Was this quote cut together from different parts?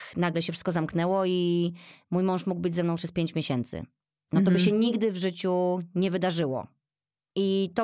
no; 0 cuts

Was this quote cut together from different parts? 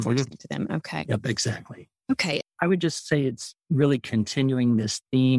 yes; 1 cut; at 2.4 s

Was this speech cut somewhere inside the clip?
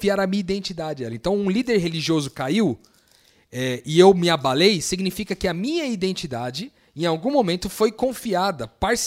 no; 0 cuts

